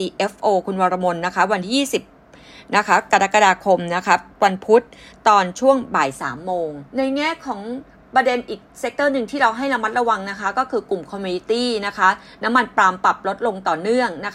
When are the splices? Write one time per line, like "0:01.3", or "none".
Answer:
0:04.3
0:06.9